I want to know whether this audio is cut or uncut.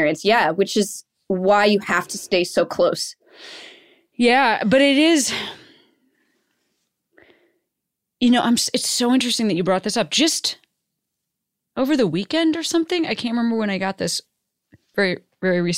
uncut